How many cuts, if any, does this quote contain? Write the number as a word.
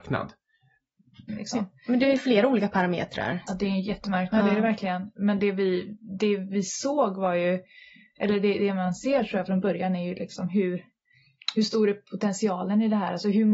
two